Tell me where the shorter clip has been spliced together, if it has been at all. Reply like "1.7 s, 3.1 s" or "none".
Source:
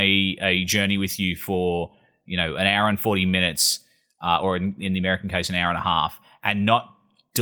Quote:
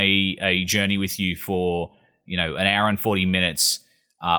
none